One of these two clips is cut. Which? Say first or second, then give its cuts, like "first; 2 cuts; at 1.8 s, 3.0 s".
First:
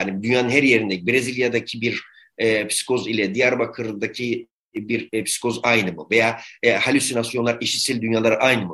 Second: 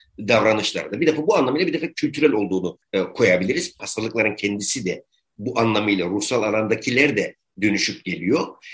second; 1 cut; at 3.8 s